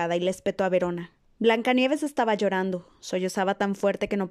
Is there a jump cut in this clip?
yes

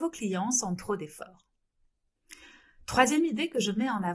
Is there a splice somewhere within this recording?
no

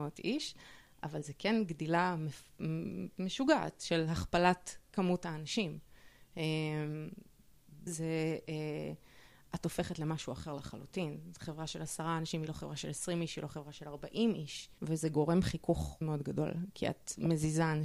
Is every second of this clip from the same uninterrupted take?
no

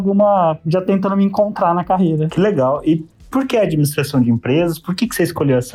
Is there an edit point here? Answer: no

